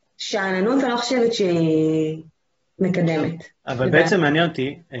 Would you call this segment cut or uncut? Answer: uncut